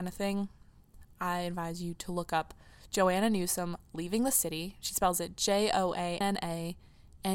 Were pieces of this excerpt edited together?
yes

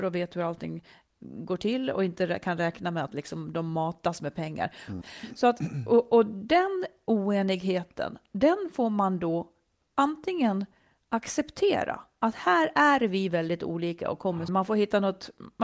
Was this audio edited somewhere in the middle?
yes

